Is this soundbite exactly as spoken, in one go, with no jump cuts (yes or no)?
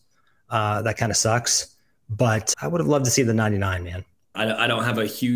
no